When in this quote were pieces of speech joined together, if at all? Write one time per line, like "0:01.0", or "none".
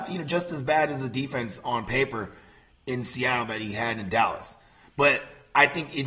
none